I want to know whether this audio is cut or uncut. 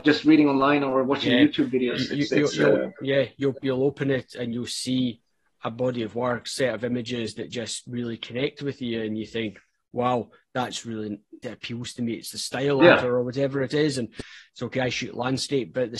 cut